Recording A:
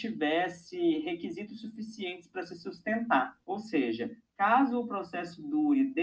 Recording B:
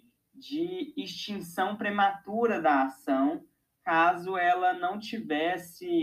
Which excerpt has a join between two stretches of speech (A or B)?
A